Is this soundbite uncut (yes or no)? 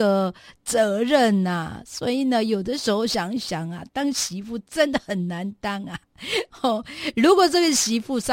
yes